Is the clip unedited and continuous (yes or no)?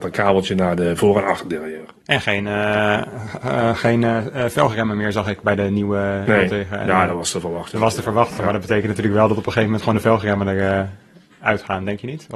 yes